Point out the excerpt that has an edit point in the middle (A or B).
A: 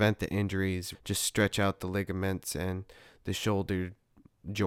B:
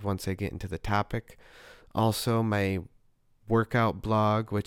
A